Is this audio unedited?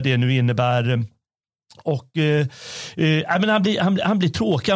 yes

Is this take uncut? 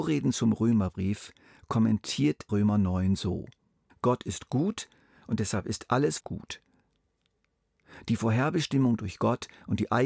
no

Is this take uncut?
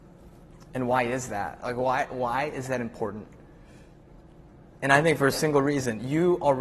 yes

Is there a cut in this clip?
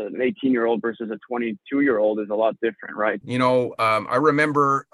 yes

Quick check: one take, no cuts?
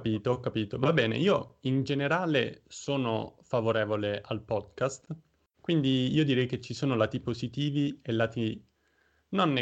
no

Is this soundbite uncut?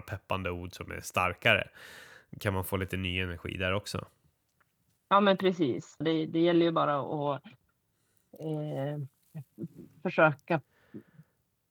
no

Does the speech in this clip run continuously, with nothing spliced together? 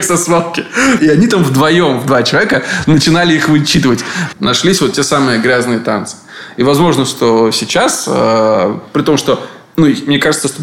no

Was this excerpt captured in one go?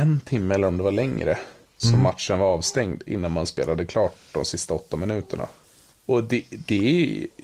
yes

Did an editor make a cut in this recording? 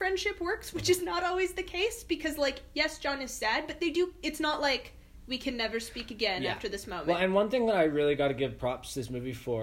no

